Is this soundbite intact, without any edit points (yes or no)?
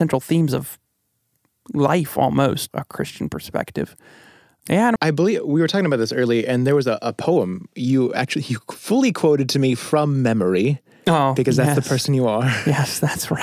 no